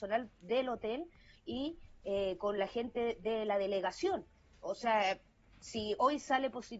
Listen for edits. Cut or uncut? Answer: uncut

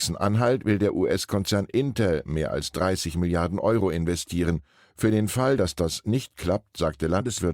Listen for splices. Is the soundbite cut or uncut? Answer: uncut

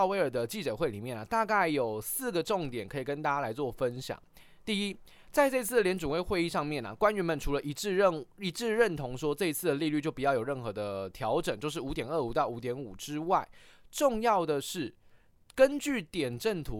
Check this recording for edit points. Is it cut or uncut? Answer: uncut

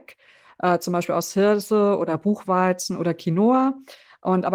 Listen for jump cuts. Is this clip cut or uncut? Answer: uncut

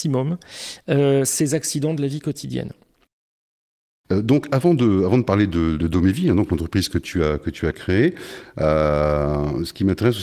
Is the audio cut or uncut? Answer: cut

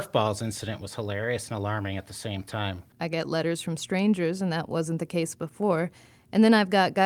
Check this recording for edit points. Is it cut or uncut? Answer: cut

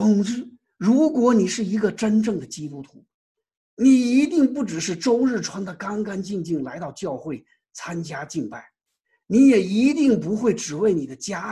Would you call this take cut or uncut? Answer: uncut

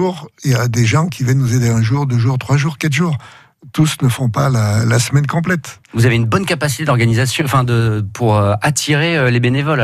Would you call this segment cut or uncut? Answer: uncut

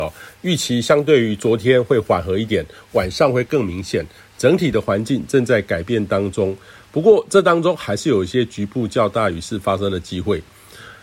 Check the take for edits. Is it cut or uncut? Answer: uncut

